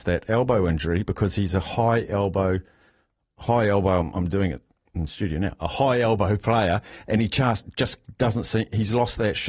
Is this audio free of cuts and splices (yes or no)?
yes